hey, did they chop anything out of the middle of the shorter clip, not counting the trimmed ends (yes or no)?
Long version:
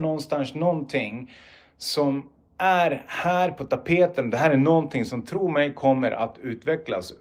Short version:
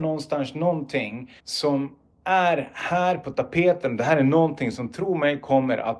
yes